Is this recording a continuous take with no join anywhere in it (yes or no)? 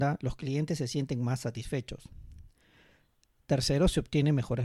yes